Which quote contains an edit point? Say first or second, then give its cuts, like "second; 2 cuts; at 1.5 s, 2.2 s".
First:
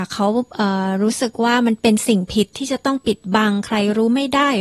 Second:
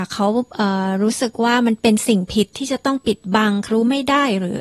second; 1 cut; at 3.7 s